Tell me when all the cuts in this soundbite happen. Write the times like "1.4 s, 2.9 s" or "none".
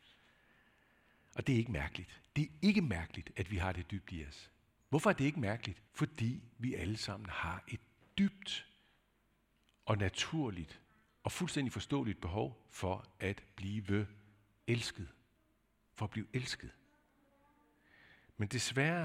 5.9 s